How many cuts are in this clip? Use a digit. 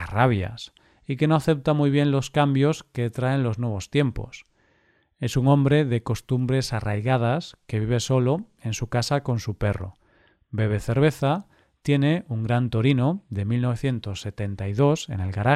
0